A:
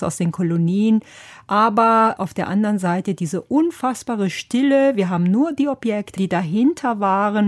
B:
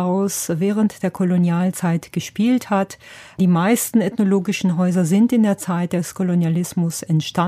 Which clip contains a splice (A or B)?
A